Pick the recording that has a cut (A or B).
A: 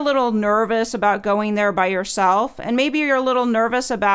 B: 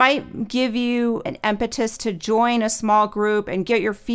B